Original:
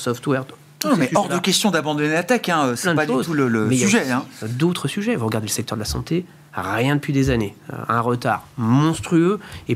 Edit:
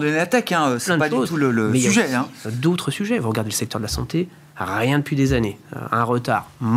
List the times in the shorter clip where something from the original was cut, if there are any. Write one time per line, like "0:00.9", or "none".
none